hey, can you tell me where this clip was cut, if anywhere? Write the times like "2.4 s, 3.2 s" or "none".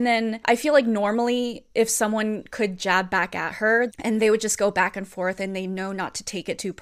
3.9 s